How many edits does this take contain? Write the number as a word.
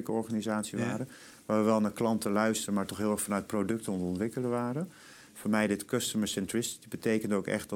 zero